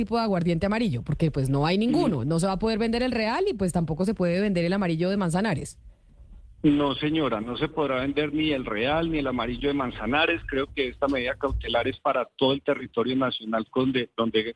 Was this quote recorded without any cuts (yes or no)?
yes